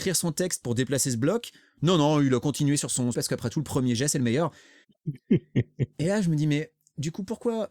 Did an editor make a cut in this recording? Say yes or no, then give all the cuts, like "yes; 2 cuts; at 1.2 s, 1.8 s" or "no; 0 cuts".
yes; 2 cuts; at 3.1 s, 4.8 s